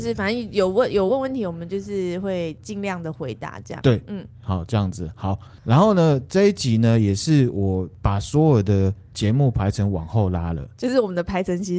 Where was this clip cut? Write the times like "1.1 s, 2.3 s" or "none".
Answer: none